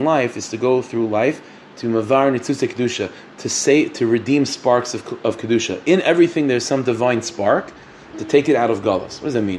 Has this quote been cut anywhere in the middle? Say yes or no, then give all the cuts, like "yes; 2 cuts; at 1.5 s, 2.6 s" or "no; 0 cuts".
yes; 1 cut; at 8.1 s